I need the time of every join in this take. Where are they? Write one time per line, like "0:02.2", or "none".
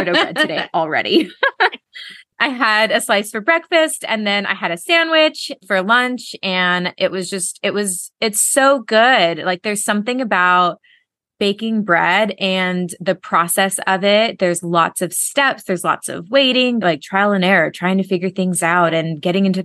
0:16.8